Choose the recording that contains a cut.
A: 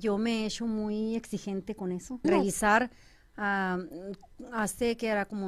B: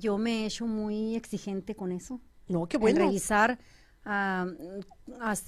A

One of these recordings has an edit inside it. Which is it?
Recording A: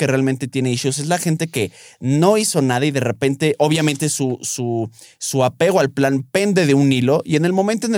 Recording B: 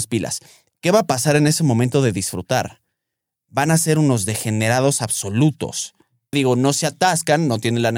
B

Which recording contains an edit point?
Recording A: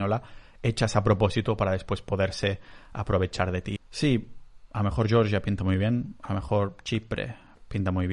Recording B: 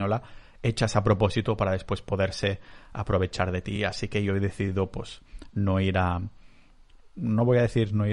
A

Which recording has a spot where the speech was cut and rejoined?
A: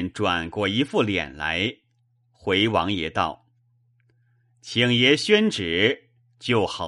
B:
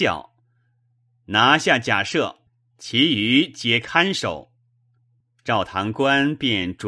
B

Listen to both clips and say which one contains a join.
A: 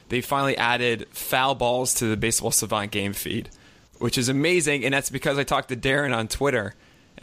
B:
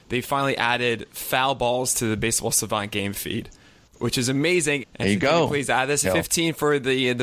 B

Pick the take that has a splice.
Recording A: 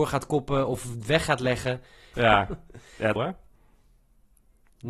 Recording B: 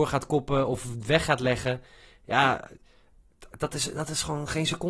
A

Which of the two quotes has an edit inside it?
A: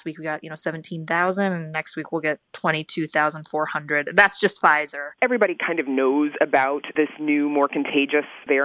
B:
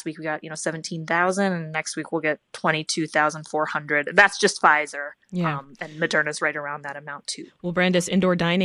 A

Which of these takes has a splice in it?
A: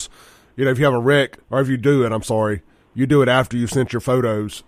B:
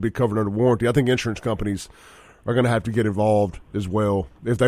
A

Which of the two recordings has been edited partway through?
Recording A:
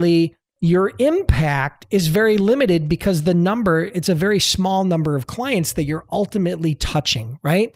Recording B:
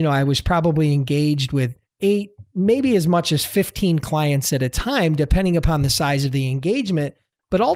B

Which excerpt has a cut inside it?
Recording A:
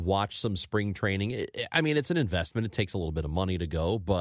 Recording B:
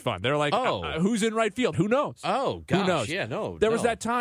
B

